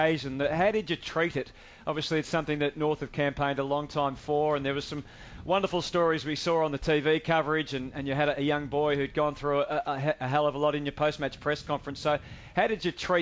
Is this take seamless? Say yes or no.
yes